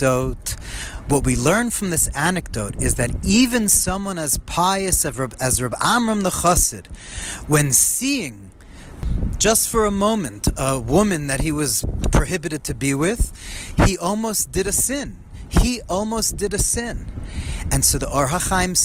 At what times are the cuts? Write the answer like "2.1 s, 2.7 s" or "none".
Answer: none